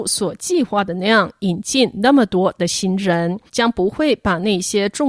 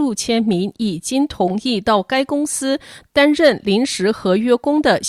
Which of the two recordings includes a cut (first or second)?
first